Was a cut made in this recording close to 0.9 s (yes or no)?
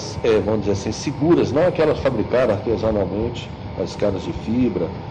no